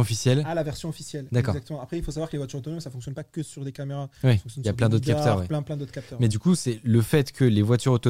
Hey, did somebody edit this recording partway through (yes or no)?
no